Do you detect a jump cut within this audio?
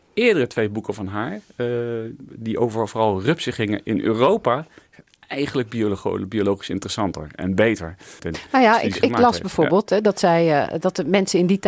yes; 1 cut; at 8.2 s

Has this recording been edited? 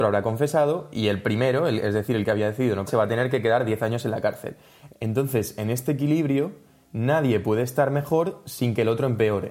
yes; 2 cuts; at 2.9 s, 4.9 s

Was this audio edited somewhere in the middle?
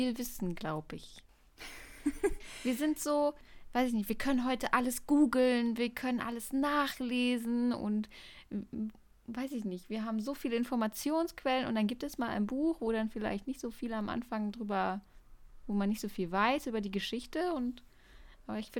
no; 0 cuts

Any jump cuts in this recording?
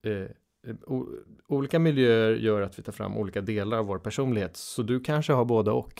no; 0 cuts

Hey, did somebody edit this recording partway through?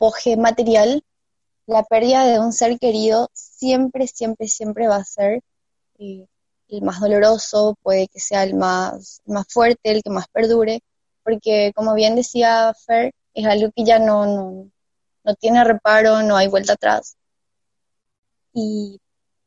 no; 0 cuts

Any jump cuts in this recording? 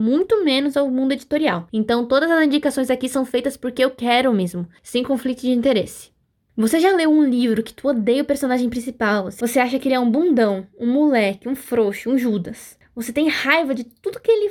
no; 0 cuts

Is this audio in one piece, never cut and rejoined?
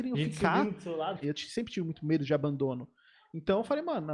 no; 1 cut; at 1.2 s

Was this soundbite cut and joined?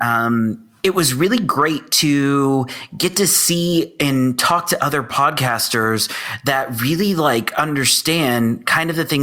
no; 0 cuts

